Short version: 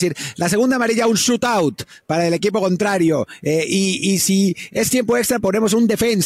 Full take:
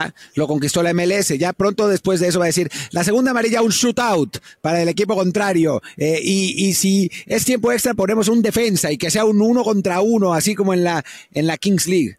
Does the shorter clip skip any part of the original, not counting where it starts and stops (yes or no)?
no